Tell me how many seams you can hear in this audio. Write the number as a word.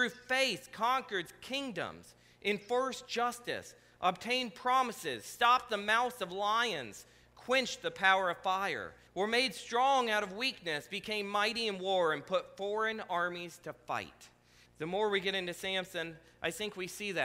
two